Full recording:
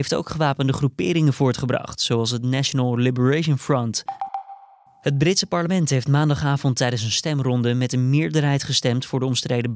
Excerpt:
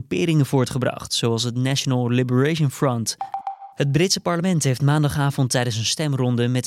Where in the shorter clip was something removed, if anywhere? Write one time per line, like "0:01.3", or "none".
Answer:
0:03.7